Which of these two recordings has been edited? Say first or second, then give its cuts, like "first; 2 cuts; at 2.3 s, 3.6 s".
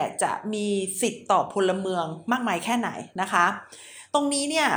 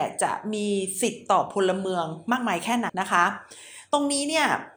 second; 1 cut; at 2.9 s